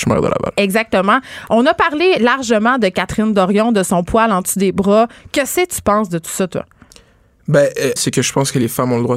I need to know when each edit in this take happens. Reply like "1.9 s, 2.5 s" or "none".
8.0 s

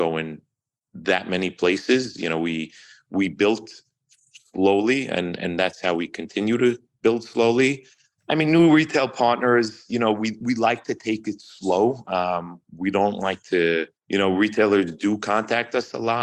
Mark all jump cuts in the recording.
8.2 s, 14.0 s

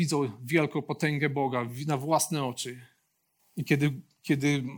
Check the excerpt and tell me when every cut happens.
3.4 s

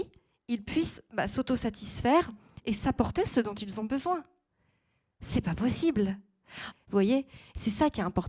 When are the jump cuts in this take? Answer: 6.7 s

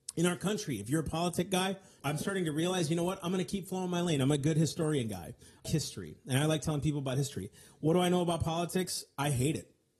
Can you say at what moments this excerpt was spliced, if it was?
2.0 s, 5.7 s

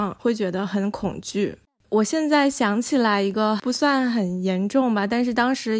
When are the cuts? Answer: none

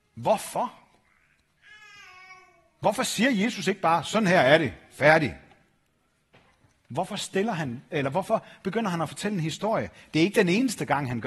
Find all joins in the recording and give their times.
none

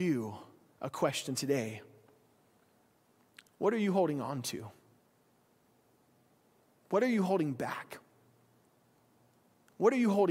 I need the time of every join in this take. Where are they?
none

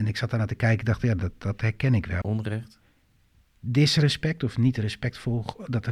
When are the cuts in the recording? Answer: 2.2 s

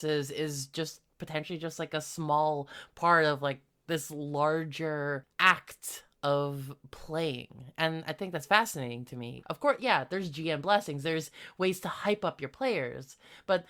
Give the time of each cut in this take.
9.4 s

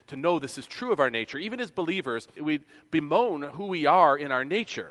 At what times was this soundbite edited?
2.4 s

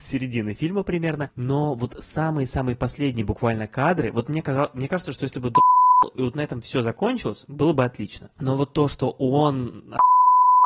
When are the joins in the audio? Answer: none

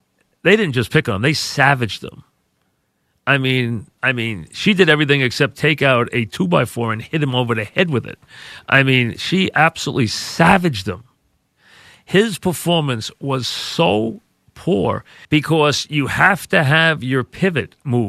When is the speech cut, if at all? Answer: 4.0 s, 15.2 s

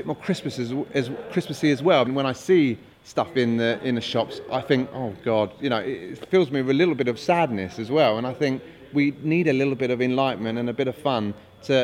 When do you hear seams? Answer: 2.1 s

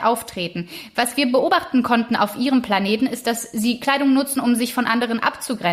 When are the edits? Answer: none

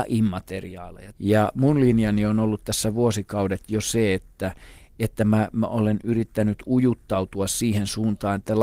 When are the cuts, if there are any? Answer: 1.1 s

